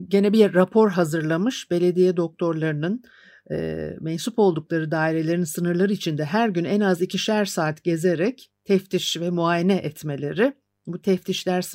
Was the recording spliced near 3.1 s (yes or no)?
no